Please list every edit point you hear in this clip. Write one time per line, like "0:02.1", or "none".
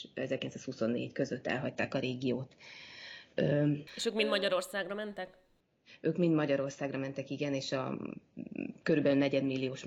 0:03.9